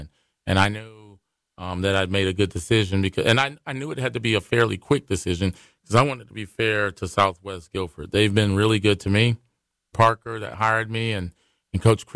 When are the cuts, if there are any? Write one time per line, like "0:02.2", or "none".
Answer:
0:09.9